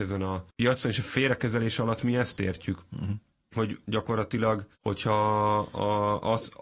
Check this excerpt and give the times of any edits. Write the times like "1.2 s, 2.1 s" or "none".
4.7 s

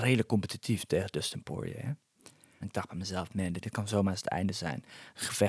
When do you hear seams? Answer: 2.6 s, 3.6 s

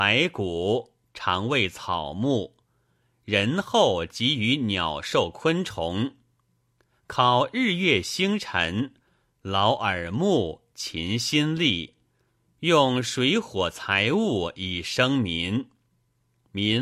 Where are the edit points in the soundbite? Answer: none

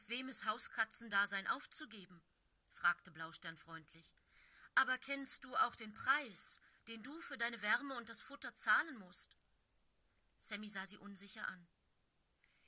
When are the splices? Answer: none

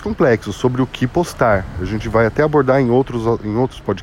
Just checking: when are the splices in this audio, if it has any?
none

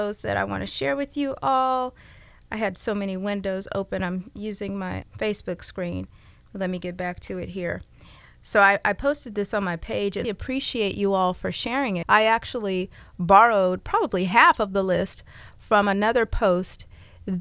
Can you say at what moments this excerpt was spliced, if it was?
5.0 s, 10.2 s, 12.0 s

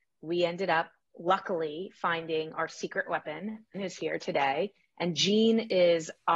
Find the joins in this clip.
3.7 s

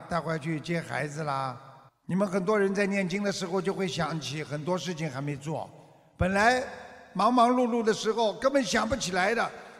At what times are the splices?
1.9 s

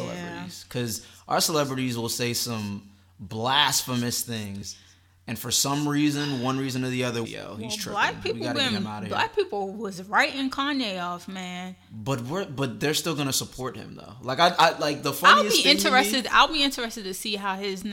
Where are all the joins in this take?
7.2 s

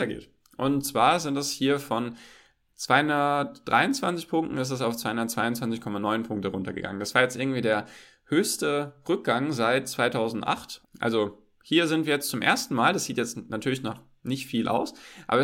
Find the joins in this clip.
10.8 s

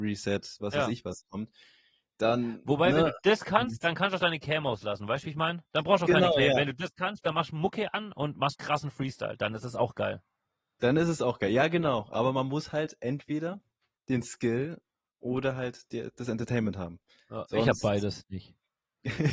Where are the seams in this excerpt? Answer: 8.5 s

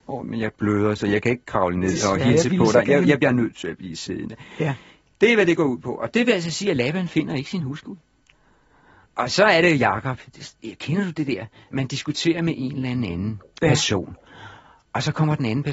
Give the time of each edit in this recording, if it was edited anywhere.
none

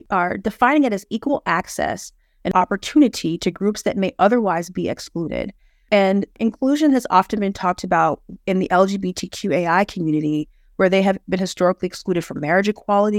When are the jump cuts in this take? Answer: none

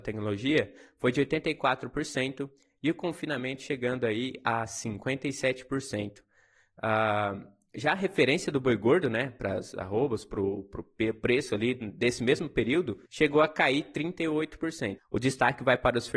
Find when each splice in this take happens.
13.1 s, 15.0 s

